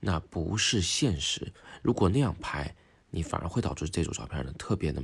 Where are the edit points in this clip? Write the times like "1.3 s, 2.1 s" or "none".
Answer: none